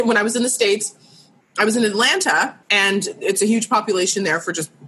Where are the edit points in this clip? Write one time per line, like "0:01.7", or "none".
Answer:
0:02.6